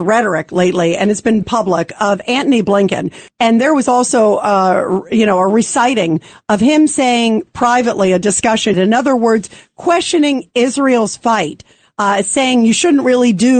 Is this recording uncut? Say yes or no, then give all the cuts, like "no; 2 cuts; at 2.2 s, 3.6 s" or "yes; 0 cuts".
no; 3 cuts; at 1.4 s, 3.3 s, 8.7 s